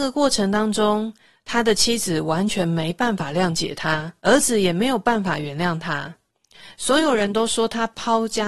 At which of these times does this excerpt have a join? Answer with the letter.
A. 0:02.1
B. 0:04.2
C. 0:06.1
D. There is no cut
B